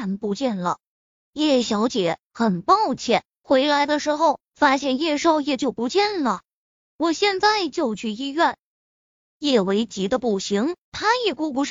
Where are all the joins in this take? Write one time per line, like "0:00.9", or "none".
0:03.3

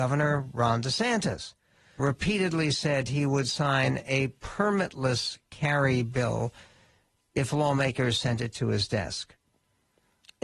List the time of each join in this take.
0:02.0

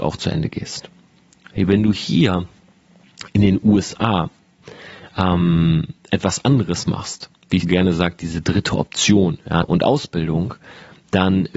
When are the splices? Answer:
0:07.6
0:09.6

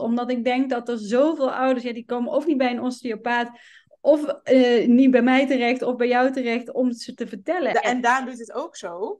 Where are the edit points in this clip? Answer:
0:07.7

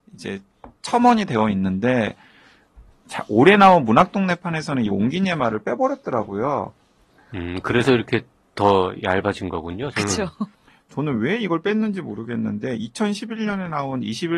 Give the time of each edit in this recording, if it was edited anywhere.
0:09.9

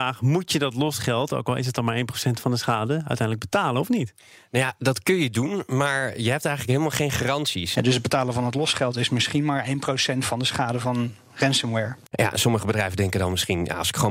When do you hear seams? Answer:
0:07.7
0:12.1

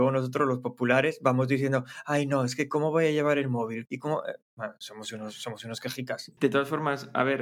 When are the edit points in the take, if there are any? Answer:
0:03.9
0:06.4

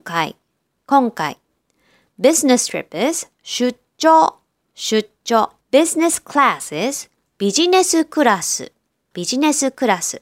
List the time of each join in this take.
0:05.6

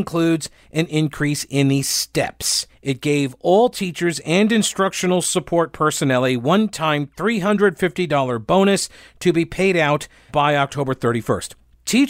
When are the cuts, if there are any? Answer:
0:02.7
0:10.3

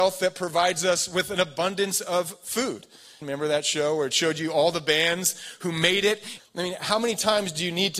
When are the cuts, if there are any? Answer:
0:03.2
0:06.4

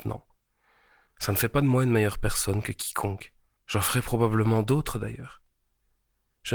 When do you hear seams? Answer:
0:01.1
0:03.6

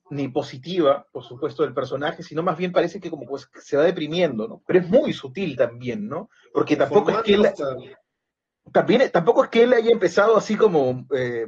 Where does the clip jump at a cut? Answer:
0:04.6

